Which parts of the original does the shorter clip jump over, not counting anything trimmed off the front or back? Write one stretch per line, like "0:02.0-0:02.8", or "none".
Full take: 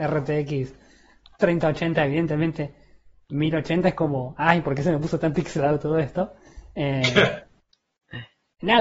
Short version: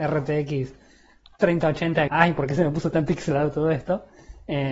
0:02.1-0:04.4